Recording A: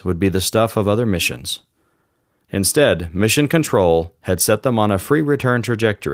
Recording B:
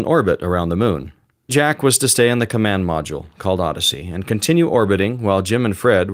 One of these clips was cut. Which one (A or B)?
B